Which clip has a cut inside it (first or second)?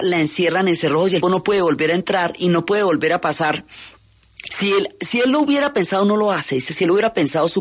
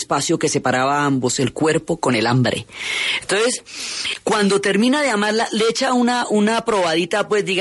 first